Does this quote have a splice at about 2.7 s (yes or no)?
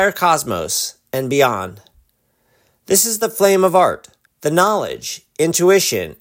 no